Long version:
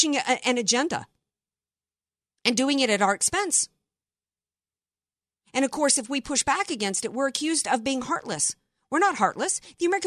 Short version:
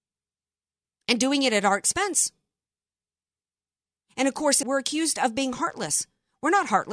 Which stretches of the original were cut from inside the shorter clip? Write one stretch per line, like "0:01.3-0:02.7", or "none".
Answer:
0:06.0-0:07.1